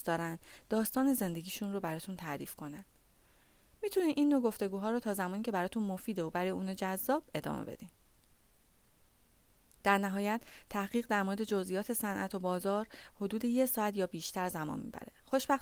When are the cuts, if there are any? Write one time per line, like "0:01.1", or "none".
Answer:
none